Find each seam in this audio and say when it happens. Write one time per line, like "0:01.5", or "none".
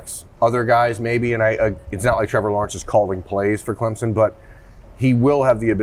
none